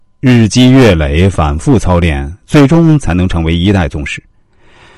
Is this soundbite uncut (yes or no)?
yes